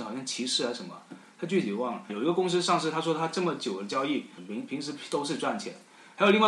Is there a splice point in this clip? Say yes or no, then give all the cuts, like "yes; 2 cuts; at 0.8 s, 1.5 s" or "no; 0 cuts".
yes; 2 cuts; at 2.1 s, 4.4 s